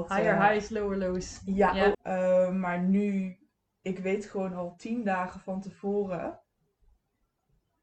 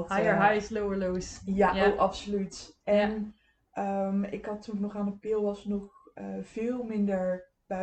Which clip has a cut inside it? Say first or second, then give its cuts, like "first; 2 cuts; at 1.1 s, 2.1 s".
first; 1 cut; at 1.9 s